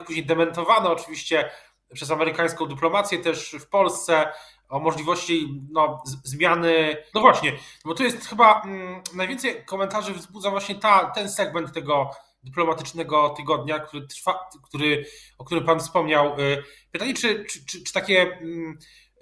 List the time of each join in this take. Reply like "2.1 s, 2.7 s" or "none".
7.1 s